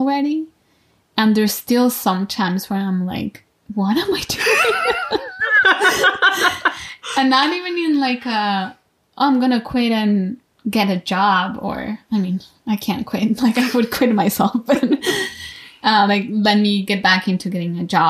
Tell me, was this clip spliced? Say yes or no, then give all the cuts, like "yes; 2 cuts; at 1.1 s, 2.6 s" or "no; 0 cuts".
no; 0 cuts